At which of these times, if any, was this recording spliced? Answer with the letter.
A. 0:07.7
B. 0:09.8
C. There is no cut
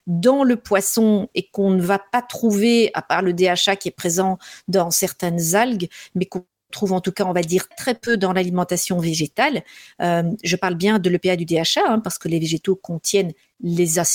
A